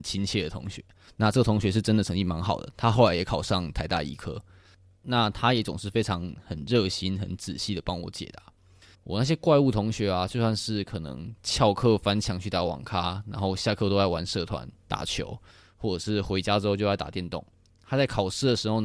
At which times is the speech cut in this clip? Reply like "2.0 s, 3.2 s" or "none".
8.9 s